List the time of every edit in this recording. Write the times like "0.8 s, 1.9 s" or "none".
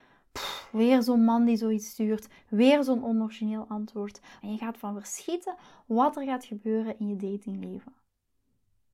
4.4 s